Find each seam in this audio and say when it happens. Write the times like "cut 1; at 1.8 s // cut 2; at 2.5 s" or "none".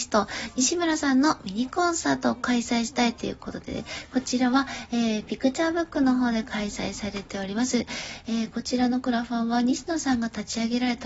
none